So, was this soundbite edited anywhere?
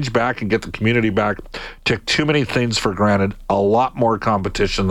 no; 0 cuts

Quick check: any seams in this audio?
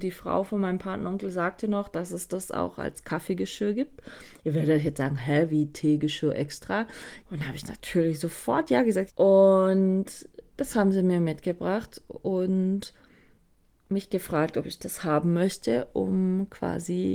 yes; 2 cuts; at 7.2 s, 9.1 s

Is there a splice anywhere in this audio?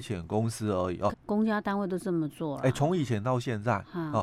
yes; 1 cut; at 1.1 s

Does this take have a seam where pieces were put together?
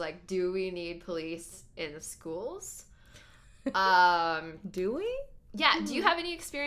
no; 0 cuts

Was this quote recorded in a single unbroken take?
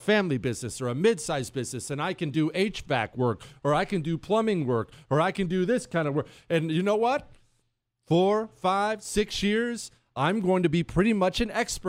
yes; 0 cuts

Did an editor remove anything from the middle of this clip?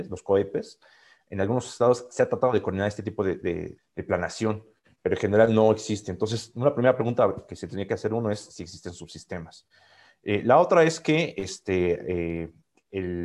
yes; 1 cut; at 3.8 s

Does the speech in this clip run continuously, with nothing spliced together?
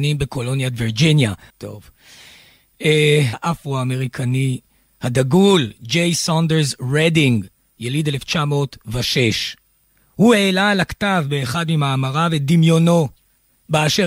no; 2 cuts; at 1.5 s, 3.3 s

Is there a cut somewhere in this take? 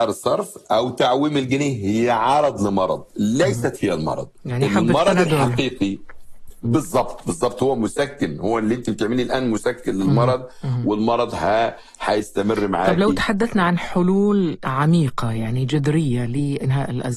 no; 0 cuts

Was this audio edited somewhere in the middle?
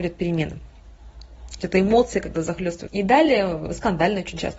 yes; 2 cuts; at 1.6 s, 2.9 s

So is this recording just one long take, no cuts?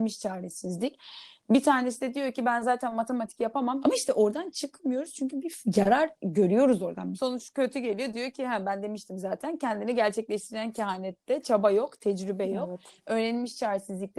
no; 2 cuts; at 3.8 s, 7.2 s

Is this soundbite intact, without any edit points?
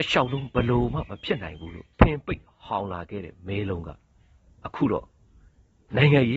no; 1 cut; at 1.9 s

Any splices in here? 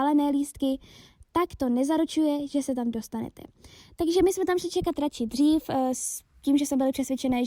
no; 0 cuts

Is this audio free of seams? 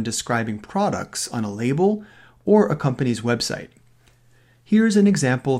yes; 0 cuts

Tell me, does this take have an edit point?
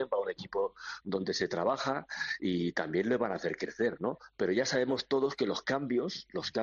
yes; 1 cut; at 1.0 s

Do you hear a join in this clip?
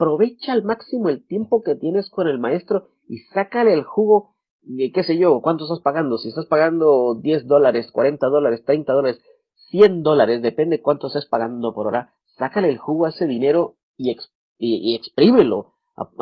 no; 0 cuts

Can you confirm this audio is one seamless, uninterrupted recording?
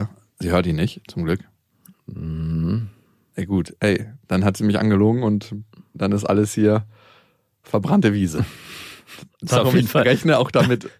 yes; 0 cuts

